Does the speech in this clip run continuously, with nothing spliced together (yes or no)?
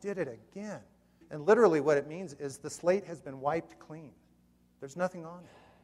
no